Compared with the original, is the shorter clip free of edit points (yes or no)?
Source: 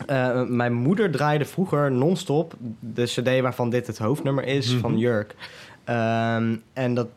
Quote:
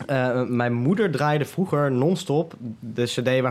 yes